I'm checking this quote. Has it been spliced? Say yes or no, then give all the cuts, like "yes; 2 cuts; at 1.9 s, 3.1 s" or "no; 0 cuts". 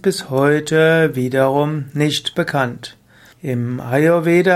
yes; 1 cut; at 3.3 s